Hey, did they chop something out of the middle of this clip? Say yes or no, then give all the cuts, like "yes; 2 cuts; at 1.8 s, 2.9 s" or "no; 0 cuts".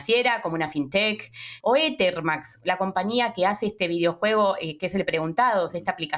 yes; 1 cut; at 1.6 s